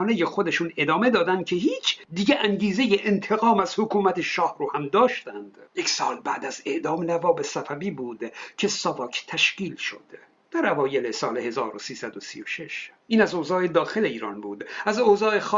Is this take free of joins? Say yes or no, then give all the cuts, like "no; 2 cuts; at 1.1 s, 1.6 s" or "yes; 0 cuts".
no; 2 cuts; at 5.7 s, 13.0 s